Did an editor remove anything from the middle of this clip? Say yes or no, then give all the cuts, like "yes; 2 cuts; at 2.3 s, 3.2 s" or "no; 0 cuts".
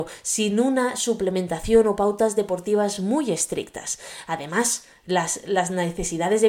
no; 0 cuts